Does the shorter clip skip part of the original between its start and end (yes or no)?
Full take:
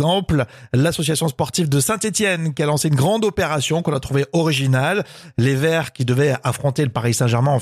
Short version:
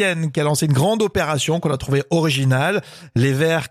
no